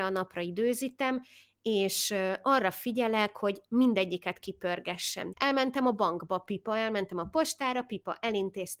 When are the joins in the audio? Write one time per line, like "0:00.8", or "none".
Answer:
0:05.3